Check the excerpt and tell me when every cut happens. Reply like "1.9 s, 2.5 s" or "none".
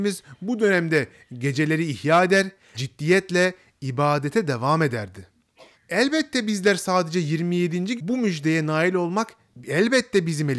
2.7 s, 5.7 s, 8.0 s

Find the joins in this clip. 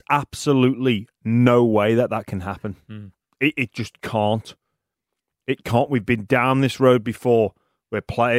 none

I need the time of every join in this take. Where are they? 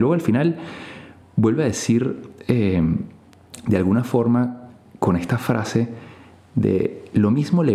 none

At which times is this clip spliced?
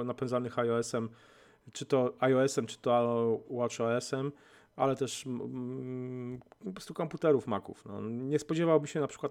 3.4 s

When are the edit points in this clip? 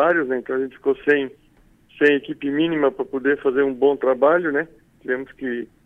none

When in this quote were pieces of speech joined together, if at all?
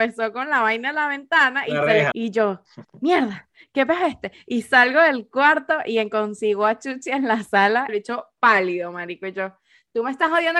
2.1 s, 7.9 s

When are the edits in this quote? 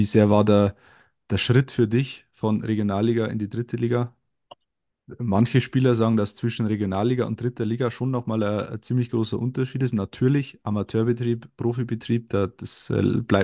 5.0 s

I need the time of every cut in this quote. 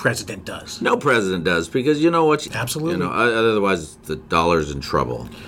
2.5 s

